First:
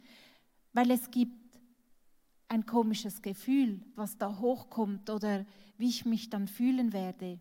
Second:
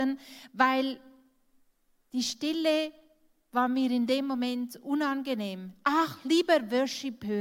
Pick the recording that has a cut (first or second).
first